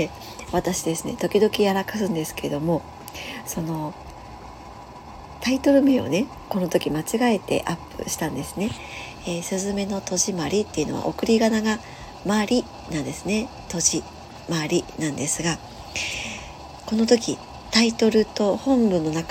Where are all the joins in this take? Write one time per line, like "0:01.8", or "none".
none